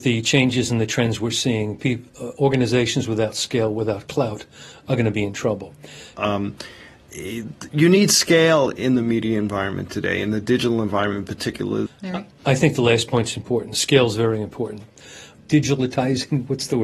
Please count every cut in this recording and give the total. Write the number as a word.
three